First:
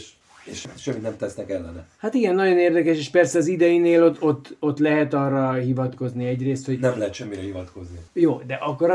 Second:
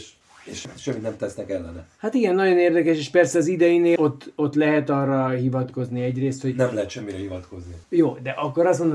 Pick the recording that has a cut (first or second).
second